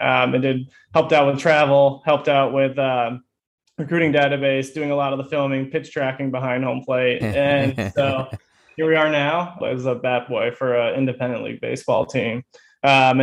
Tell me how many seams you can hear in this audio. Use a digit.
2